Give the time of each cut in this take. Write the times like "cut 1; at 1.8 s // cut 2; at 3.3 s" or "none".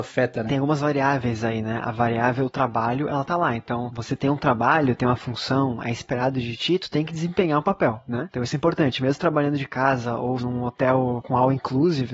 cut 1; at 8.3 s // cut 2; at 10.4 s